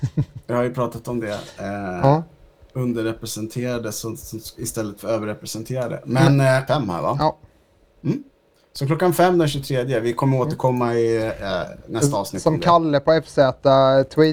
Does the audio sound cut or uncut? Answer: cut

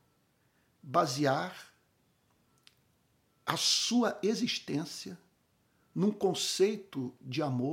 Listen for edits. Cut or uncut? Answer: uncut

